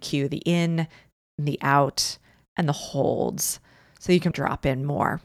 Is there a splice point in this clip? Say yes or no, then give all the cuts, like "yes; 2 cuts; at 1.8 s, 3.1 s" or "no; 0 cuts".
yes; 1 cut; at 4.3 s